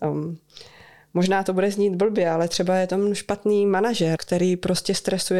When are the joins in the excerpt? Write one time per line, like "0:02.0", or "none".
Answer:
0:04.2